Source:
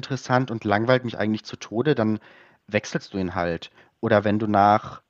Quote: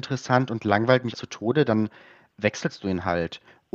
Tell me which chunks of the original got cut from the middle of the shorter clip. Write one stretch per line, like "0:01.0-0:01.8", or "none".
0:01.1-0:01.4